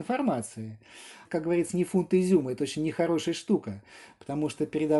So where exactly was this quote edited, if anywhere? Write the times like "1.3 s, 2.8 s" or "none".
none

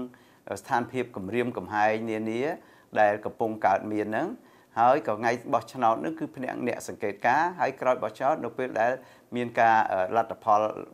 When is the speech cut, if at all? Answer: none

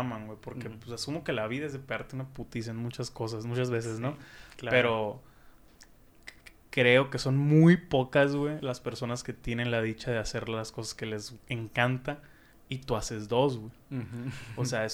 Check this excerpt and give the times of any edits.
none

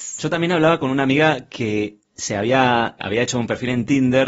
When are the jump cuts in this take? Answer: 3.0 s

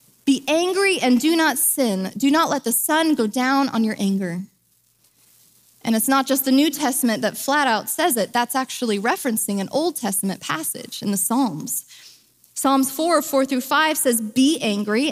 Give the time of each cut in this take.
none

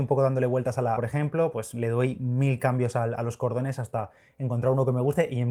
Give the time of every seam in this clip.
1.0 s

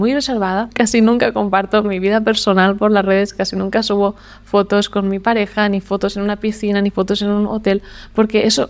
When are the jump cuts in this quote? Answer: none

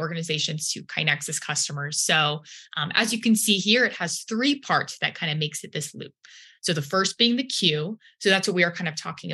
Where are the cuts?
none

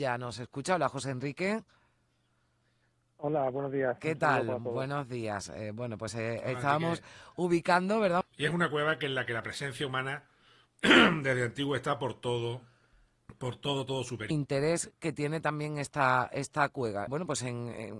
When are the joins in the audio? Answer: 8.2 s, 14.3 s, 17.1 s

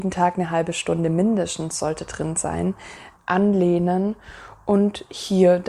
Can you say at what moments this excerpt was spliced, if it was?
3.2 s

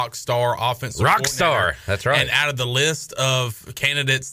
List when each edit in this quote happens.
none

